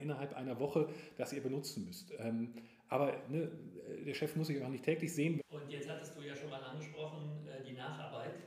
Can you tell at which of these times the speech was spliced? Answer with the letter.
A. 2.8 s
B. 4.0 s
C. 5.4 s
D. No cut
C